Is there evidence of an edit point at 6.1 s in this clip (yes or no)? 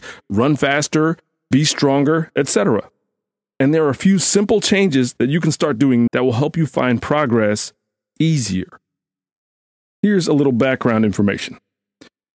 yes